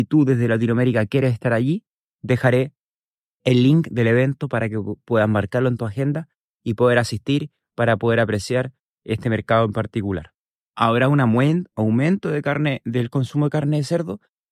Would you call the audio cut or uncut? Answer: cut